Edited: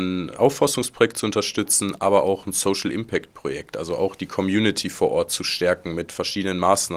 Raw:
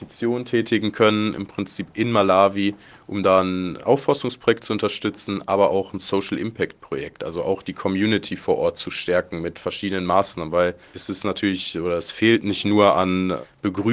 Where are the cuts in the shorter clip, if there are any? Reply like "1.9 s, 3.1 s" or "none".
none